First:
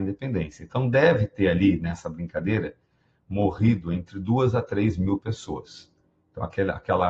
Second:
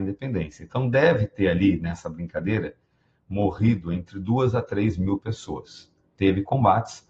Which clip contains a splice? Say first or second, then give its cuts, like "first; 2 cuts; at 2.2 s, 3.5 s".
second; 1 cut; at 6.1 s